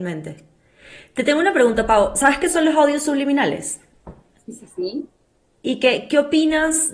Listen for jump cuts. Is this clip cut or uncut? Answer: uncut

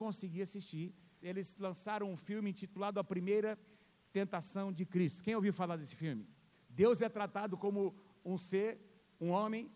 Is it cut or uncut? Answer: cut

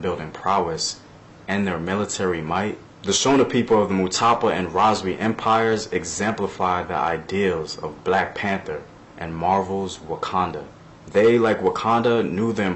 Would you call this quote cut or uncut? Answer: uncut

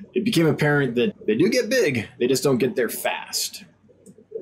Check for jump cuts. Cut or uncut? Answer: cut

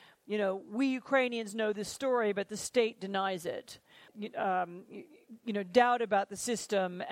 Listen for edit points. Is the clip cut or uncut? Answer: cut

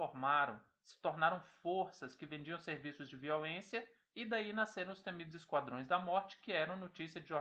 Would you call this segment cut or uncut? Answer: uncut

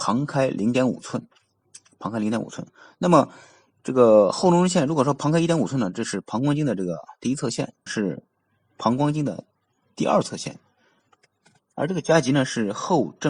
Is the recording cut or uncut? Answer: cut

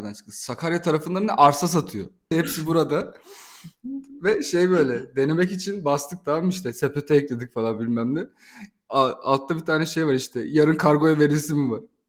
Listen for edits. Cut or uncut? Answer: cut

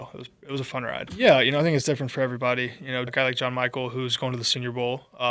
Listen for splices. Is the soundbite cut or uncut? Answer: cut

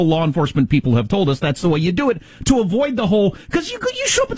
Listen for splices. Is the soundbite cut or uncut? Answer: uncut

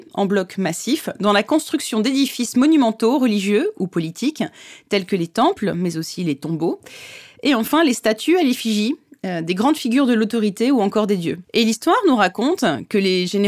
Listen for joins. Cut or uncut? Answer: cut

